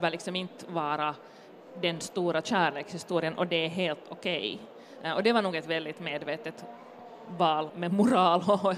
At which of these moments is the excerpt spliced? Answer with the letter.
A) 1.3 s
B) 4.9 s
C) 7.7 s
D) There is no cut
C